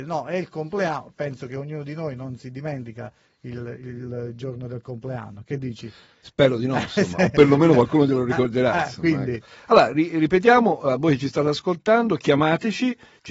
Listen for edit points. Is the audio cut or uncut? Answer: uncut